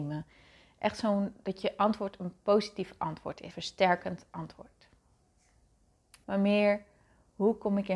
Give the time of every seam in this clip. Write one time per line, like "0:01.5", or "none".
0:03.5
0:06.2